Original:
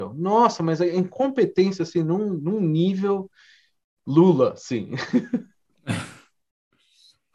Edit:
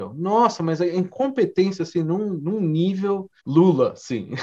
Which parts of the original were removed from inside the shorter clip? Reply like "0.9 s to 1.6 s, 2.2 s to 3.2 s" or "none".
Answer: 3.4 s to 4.0 s

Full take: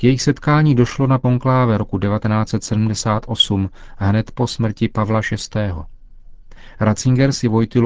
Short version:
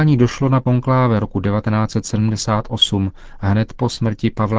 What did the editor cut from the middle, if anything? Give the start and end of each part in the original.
none

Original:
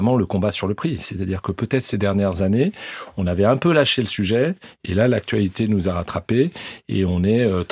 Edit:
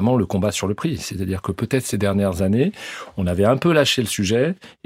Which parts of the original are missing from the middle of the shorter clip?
none

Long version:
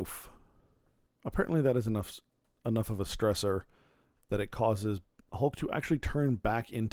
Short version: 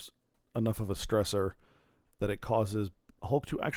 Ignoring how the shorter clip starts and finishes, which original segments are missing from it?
none

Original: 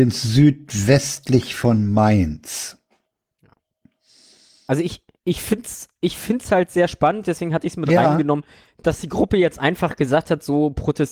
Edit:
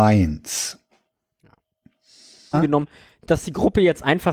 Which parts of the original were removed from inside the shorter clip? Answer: 4.5 s to 8.1 s

